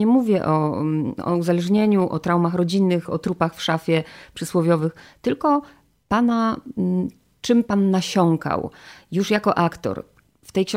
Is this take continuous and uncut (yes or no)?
yes